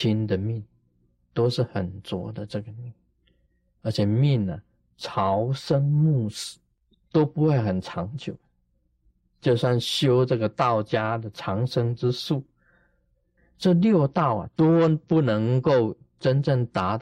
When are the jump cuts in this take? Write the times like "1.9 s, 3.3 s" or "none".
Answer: 13.4 s, 14.5 s